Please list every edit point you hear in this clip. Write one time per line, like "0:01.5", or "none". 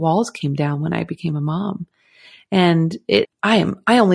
0:03.2